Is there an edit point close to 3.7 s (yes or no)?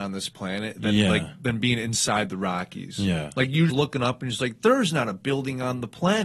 yes